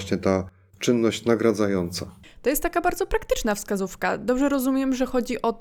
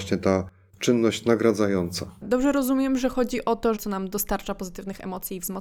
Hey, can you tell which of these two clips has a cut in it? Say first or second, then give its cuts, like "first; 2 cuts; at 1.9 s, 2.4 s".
second; 2 cuts; at 2.2 s, 3.8 s